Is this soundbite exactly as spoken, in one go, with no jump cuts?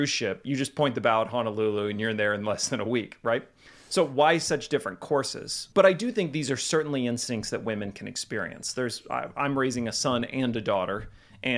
no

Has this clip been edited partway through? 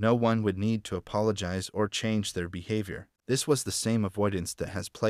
yes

